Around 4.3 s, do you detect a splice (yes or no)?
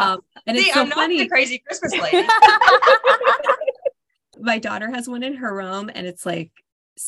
yes